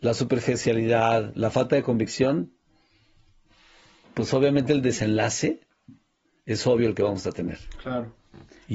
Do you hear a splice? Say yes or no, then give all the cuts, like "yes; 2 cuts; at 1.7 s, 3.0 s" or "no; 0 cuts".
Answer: no; 0 cuts